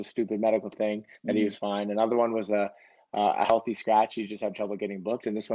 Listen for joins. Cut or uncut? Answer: uncut